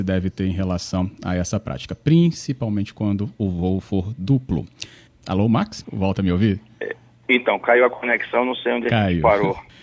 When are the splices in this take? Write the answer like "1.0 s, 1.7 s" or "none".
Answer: 5.1 s